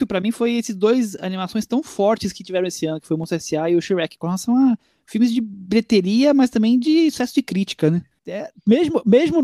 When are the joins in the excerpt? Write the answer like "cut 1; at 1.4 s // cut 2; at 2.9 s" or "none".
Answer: cut 1; at 8.2 s